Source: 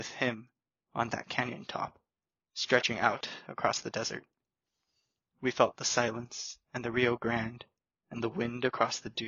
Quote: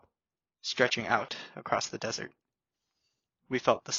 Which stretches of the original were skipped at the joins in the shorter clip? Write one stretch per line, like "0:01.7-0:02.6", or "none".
none